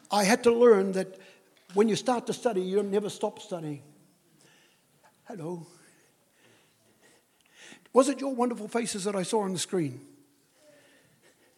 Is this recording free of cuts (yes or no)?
yes